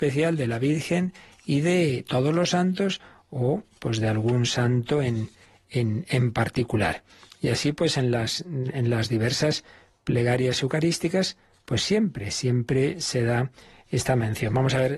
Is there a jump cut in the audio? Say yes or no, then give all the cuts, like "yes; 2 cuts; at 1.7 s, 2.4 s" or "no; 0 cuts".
no; 0 cuts